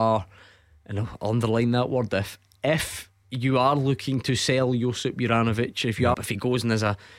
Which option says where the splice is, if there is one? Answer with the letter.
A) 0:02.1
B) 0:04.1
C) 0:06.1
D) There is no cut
C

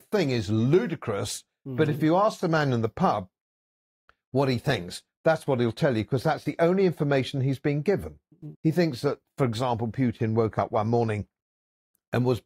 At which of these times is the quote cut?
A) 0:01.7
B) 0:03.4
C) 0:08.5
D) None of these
C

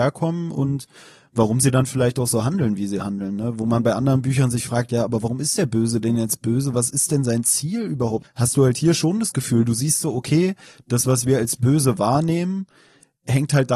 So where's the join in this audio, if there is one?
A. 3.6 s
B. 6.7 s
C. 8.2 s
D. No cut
C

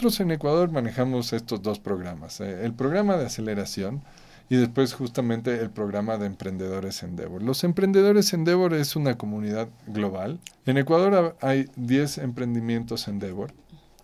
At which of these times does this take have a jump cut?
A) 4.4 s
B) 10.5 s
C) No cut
B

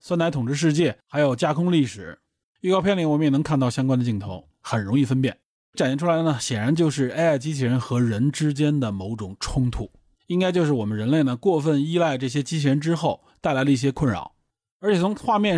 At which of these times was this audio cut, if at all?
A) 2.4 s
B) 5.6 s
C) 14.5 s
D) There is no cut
A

